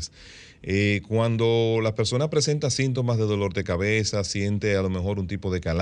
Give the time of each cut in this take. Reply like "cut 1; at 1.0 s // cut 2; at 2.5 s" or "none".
none